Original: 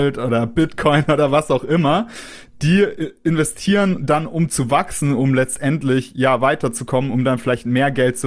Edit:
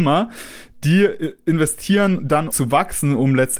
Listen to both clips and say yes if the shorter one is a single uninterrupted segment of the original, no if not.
no